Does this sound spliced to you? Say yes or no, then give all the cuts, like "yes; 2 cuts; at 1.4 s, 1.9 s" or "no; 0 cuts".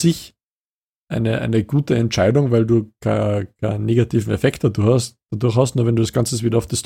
no; 0 cuts